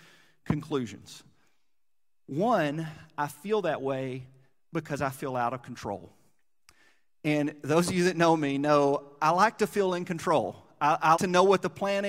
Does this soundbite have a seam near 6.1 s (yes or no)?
no